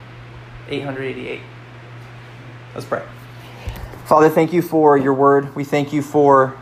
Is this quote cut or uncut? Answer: uncut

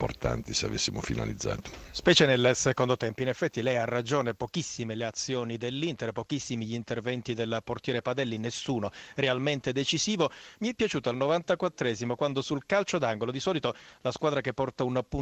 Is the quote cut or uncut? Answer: uncut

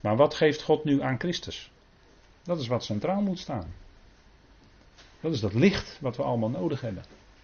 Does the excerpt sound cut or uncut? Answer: cut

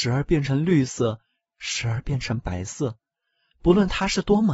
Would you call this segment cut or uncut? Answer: uncut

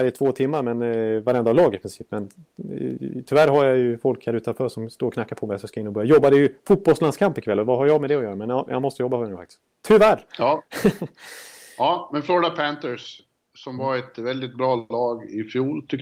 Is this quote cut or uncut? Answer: uncut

